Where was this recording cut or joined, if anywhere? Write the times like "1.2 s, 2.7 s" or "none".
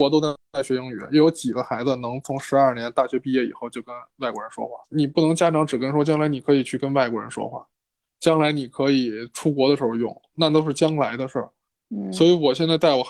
4.8 s

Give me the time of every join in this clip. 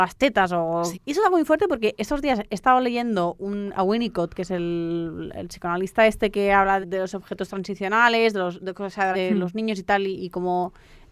0.9 s, 6.8 s, 9.1 s

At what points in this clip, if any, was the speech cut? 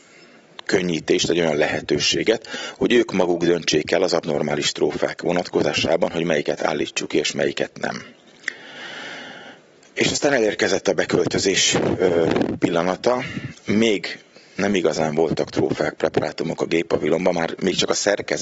none

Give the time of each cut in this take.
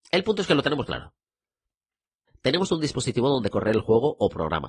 2.3 s

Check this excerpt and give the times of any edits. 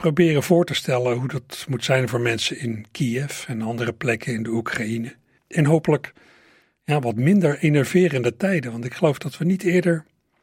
5.4 s

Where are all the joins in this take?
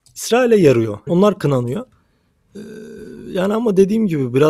1.1 s

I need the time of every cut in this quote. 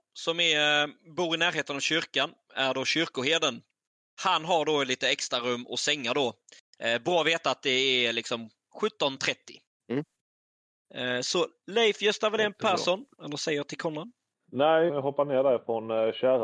13.1 s, 14.9 s

